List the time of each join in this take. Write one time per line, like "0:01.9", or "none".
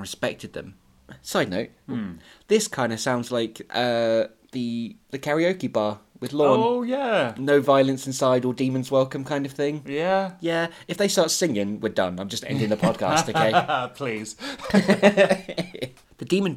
0:01.9